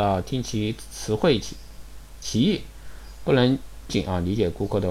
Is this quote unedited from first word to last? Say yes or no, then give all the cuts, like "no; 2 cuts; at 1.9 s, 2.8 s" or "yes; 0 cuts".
no; 1 cut; at 3.9 s